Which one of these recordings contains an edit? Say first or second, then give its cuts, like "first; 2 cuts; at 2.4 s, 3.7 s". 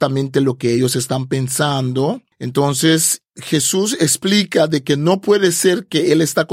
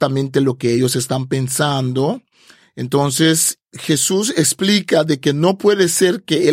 first; 1 cut; at 2.3 s